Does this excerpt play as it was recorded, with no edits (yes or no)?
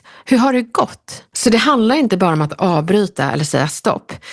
no